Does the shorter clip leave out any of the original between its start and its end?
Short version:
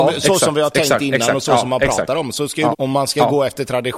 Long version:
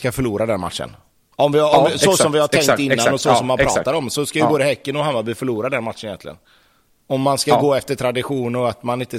yes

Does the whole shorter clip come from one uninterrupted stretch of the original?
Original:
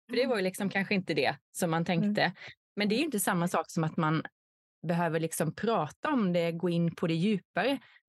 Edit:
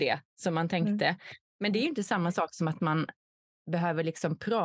yes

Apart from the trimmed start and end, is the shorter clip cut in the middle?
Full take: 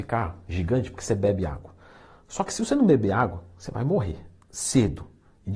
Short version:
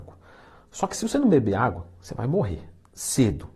no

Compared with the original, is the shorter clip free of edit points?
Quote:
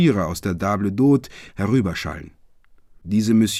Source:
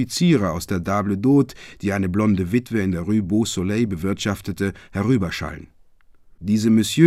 no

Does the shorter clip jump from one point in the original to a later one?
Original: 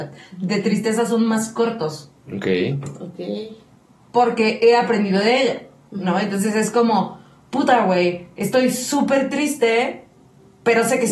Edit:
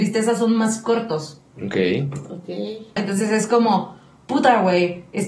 yes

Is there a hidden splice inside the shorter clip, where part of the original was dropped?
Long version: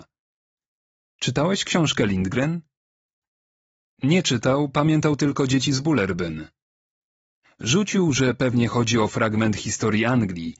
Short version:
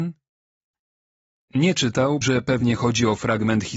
yes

